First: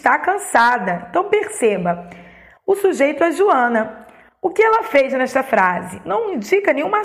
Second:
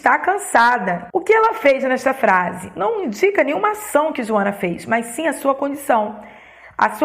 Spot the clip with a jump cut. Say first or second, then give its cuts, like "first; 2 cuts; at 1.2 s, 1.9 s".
second; 1 cut; at 1.1 s